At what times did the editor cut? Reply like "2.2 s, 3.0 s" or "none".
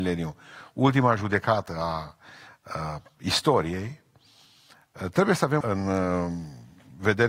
5.6 s